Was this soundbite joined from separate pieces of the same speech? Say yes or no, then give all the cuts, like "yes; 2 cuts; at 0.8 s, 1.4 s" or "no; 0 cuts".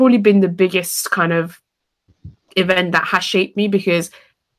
no; 0 cuts